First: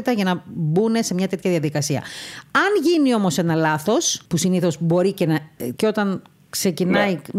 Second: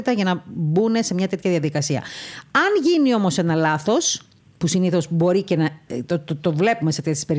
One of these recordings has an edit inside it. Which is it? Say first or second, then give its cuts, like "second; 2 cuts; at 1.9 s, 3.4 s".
first; 2 cuts; at 4.3 s, 5.8 s